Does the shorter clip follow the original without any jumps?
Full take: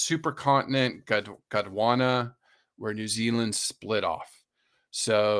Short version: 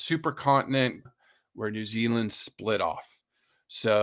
no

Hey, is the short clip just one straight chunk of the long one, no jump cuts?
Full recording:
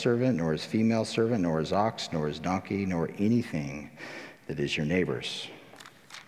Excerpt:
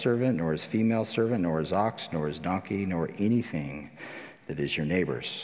yes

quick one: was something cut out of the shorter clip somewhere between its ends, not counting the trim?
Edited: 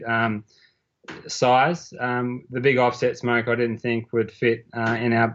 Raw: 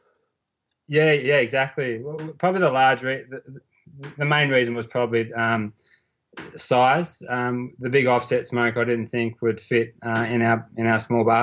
no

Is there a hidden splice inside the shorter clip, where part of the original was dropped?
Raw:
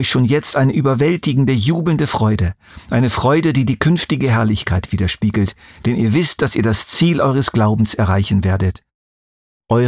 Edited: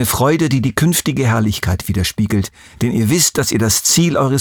no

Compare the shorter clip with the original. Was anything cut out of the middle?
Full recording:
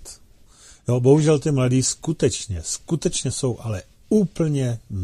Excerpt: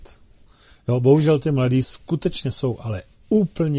yes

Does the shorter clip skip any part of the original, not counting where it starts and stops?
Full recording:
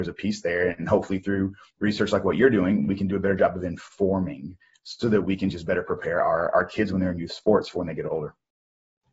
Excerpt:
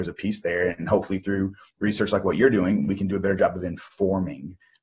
no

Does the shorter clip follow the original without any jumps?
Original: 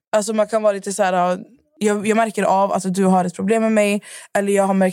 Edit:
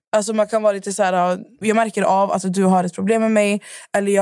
no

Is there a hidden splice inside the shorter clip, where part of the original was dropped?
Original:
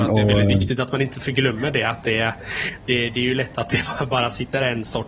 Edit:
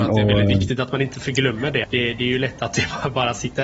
yes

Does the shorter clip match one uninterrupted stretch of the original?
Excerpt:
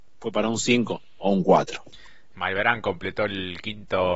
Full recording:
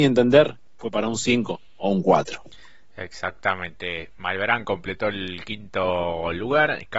no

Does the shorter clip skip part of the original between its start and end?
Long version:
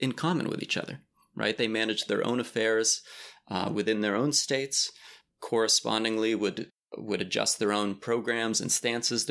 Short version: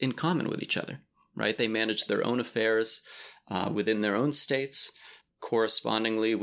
no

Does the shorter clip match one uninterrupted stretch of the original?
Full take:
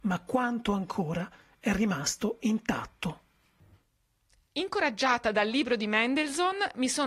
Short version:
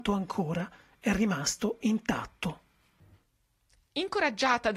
yes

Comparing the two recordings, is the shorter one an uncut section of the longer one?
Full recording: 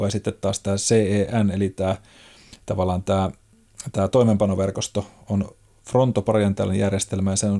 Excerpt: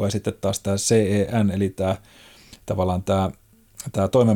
yes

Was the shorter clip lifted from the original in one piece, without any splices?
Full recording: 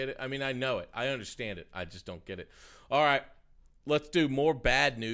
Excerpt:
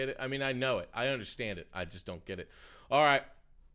yes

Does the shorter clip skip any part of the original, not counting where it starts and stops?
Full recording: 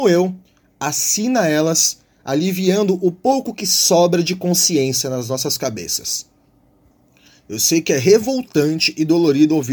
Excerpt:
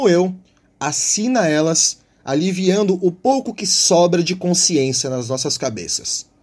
no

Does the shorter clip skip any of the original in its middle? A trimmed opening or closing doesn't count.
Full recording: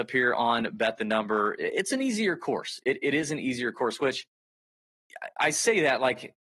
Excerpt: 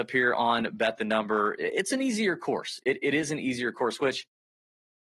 no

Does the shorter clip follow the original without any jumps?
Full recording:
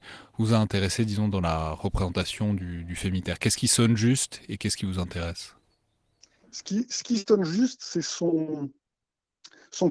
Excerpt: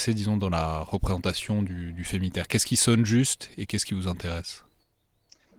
yes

